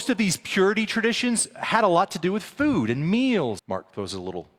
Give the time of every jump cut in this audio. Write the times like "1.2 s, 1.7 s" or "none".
3.6 s